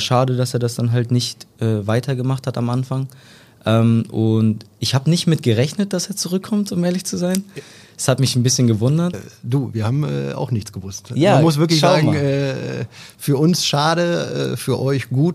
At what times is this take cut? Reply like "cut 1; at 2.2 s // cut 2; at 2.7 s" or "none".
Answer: cut 1; at 9.1 s